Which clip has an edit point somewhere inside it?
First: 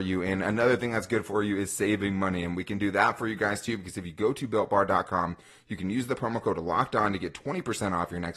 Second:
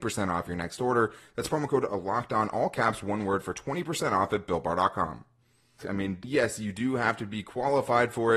second; 1 cut; at 5.8 s

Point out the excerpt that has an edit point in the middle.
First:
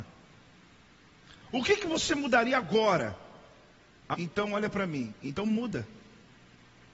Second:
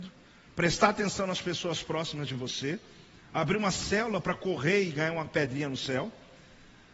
first; 1 cut; at 4.1 s

